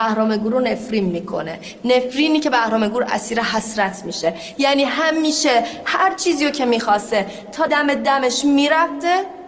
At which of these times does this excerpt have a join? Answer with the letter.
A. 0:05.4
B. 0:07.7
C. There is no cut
B